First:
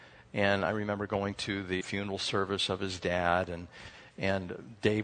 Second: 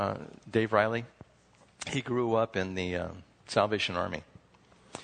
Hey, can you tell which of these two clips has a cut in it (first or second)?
first